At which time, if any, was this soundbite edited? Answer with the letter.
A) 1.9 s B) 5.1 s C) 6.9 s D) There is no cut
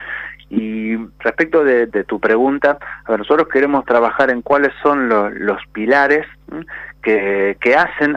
A